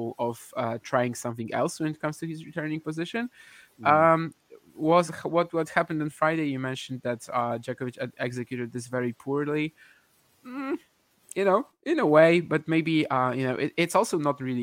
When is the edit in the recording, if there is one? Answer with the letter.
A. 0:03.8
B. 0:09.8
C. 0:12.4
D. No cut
D